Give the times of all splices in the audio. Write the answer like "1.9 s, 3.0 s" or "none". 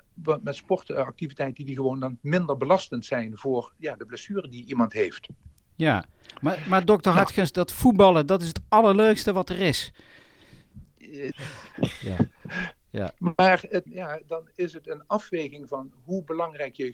11.3 s, 13.9 s